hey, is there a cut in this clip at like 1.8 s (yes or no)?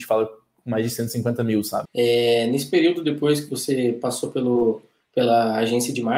yes